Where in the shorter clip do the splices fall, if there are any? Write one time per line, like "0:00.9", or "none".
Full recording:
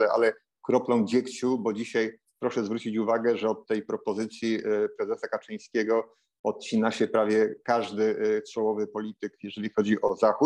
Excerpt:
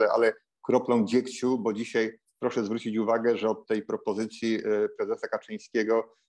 none